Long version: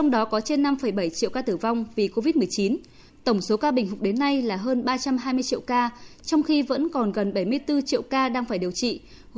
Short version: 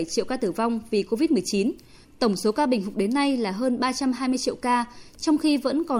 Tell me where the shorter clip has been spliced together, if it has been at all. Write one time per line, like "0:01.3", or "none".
none